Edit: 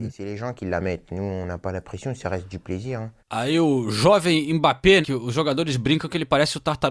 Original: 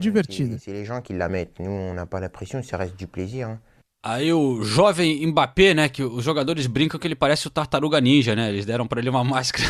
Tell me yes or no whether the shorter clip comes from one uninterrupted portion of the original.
no